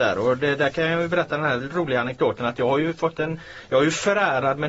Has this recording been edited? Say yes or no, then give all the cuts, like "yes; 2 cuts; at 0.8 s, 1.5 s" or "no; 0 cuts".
no; 0 cuts